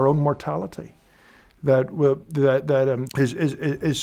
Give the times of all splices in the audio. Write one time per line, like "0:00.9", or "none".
0:03.1